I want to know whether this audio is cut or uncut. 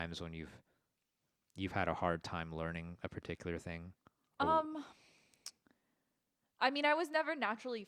uncut